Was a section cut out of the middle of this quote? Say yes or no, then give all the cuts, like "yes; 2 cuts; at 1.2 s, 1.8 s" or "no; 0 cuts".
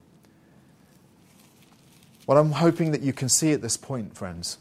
no; 0 cuts